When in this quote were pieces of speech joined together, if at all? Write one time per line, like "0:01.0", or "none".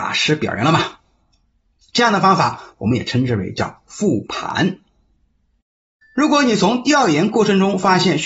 0:06.0